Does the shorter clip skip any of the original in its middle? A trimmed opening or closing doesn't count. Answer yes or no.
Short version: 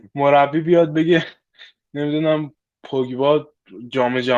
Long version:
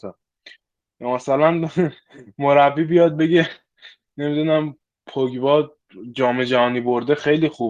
no